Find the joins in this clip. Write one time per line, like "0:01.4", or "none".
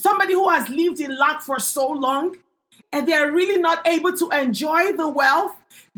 0:02.8